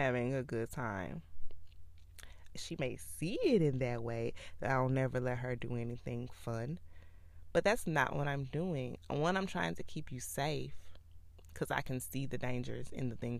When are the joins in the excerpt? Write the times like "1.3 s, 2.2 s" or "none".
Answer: 2.6 s